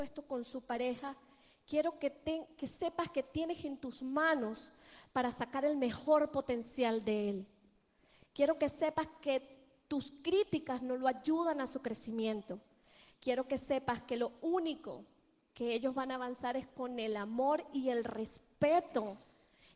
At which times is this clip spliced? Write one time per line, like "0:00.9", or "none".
none